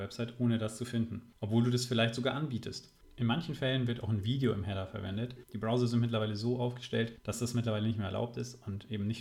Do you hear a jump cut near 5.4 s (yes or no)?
yes